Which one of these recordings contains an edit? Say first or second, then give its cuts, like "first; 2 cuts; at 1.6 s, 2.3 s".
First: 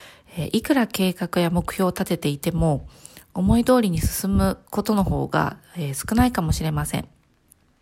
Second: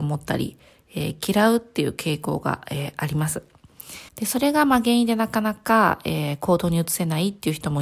second; 1 cut; at 4.1 s